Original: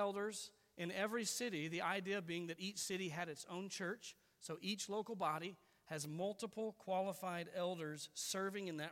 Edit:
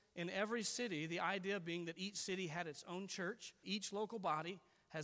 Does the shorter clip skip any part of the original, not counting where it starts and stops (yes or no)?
yes